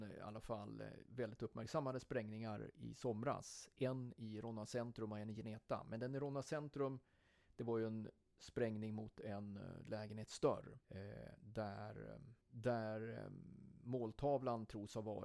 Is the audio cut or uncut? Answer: cut